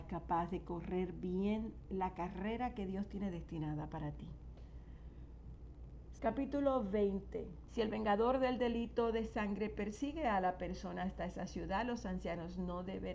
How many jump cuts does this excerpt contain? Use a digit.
2